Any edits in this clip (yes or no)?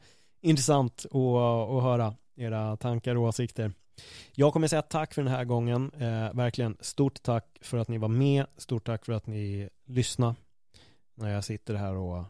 no